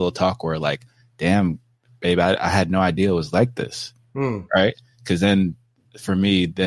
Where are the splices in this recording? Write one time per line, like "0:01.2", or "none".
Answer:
none